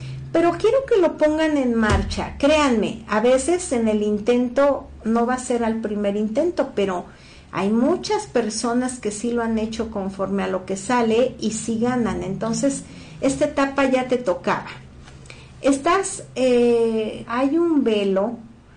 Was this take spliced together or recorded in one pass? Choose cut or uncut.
cut